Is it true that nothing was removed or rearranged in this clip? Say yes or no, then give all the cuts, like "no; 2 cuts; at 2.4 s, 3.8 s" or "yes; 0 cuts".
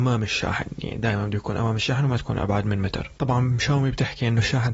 no; 1 cut; at 3.2 s